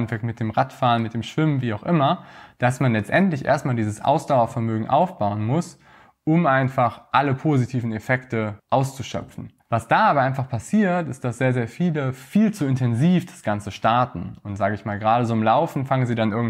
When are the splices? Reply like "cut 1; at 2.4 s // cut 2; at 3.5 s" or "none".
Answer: none